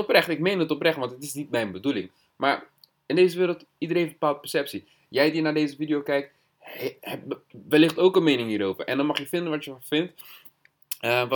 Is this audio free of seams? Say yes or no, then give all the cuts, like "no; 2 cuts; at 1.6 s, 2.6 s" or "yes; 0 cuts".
yes; 0 cuts